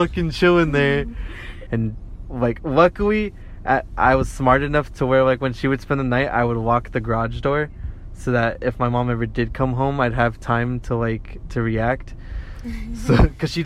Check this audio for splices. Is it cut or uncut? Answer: cut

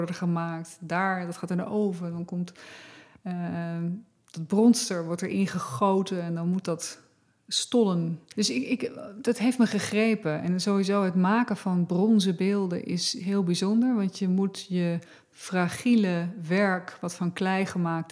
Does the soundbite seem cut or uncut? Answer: cut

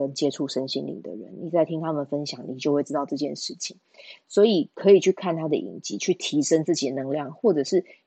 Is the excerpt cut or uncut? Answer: uncut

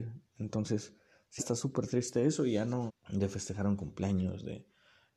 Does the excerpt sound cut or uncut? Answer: cut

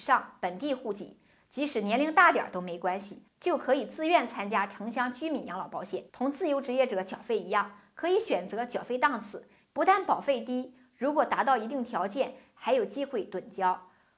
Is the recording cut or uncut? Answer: cut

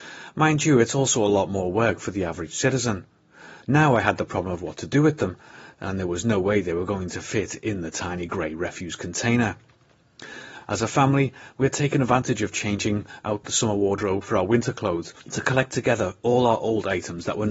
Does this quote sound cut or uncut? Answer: cut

